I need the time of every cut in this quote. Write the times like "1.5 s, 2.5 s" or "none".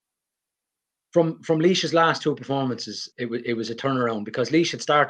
3.1 s